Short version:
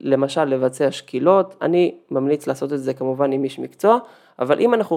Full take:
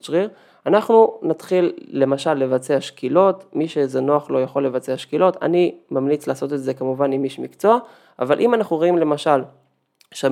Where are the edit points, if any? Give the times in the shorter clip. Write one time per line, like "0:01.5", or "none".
0:01.6